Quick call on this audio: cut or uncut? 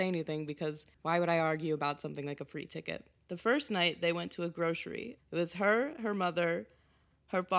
cut